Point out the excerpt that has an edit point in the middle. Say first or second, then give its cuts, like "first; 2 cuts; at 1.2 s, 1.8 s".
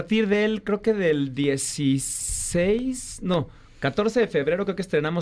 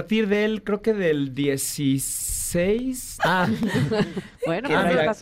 second; 1 cut; at 3.2 s